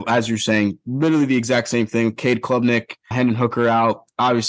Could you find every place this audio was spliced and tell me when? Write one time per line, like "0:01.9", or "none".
0:03.1